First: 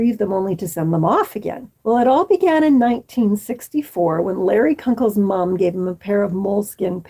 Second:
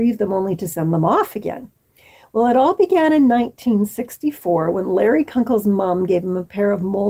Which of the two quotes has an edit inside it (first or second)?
first